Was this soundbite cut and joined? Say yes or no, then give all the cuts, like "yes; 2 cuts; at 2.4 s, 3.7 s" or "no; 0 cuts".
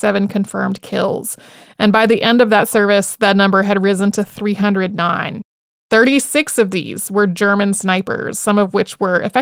no; 0 cuts